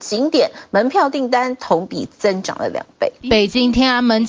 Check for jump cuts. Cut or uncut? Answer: cut